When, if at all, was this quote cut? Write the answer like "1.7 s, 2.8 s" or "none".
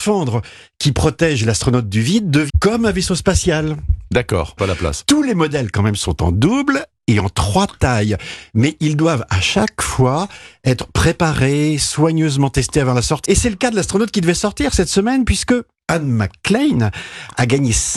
2.5 s, 4.6 s, 13.3 s